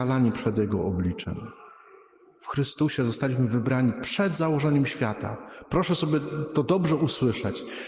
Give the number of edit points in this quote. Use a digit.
0